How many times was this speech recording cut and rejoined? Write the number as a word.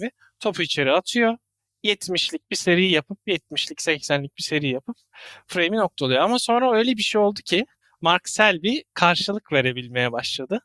one